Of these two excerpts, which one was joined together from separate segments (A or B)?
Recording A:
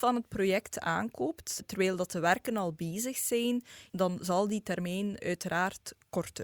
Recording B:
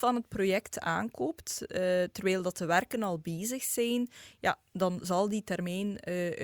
A